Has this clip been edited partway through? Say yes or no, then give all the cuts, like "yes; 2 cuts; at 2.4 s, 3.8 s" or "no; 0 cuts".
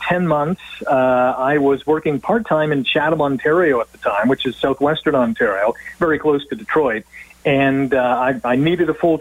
no; 0 cuts